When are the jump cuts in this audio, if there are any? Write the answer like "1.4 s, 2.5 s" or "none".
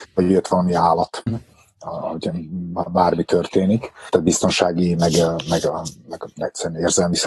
1.3 s